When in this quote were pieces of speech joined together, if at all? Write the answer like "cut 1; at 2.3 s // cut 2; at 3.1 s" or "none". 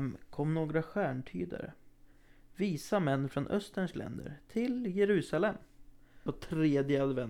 cut 1; at 6.3 s